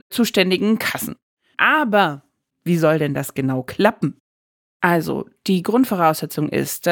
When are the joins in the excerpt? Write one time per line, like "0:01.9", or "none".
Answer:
0:01.5